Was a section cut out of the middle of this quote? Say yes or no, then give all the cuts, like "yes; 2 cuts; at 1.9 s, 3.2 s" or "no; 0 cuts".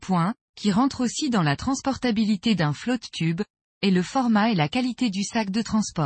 yes; 1 cut; at 3.7 s